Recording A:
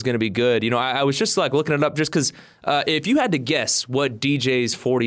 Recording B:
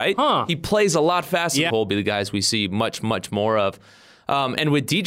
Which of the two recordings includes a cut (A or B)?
B